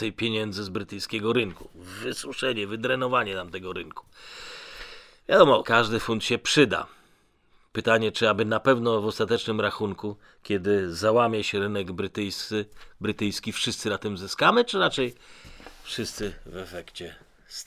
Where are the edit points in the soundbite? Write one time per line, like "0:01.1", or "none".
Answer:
0:05.6